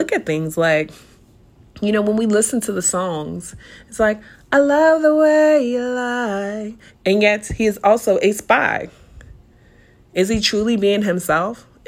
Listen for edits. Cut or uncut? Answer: cut